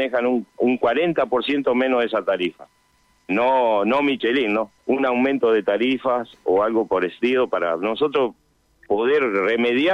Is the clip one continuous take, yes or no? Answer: no